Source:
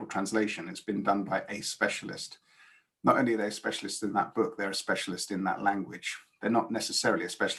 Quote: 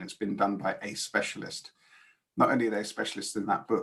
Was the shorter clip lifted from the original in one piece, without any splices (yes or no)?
yes